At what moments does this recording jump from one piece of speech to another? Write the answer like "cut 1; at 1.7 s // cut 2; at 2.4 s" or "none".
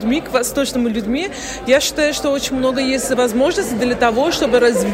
none